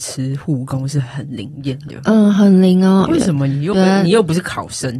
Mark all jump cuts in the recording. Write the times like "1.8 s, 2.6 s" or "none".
3.1 s

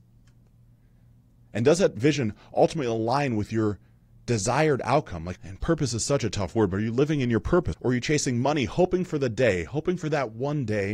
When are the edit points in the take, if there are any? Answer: 5.4 s, 7.7 s

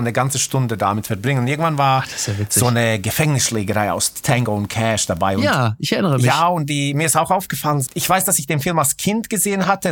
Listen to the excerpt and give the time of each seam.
7.8 s

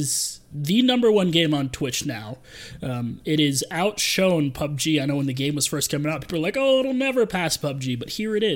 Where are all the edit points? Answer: none

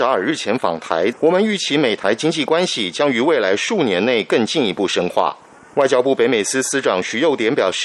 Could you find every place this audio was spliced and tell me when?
1.1 s

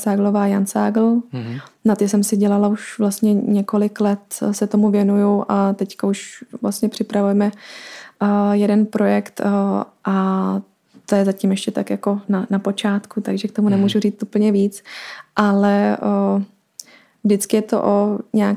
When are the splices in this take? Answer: 12.2 s

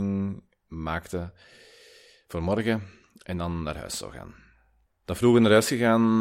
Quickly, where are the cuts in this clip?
4.9 s

